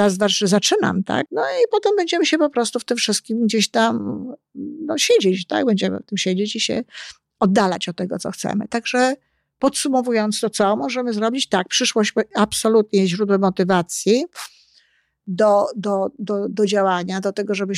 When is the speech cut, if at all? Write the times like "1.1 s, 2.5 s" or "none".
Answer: 1.3 s